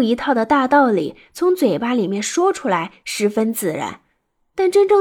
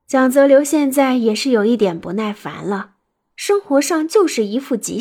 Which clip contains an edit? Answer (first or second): second